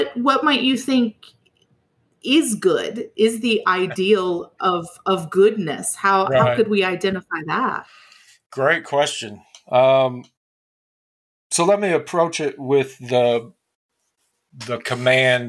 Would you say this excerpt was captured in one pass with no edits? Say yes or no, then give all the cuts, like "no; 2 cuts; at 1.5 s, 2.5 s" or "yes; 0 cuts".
yes; 0 cuts